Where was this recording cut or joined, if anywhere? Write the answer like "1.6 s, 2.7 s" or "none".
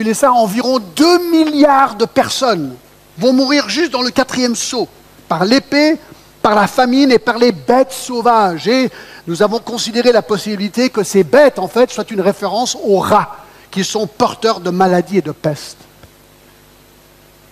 none